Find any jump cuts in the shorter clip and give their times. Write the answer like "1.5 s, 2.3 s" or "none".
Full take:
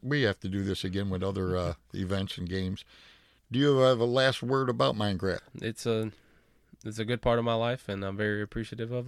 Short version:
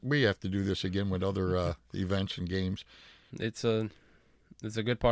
3.3 s